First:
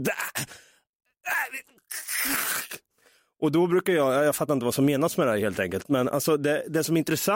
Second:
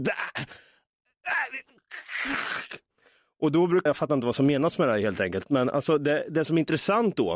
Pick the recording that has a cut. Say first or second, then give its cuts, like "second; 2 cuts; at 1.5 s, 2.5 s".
second; 1 cut; at 3.9 s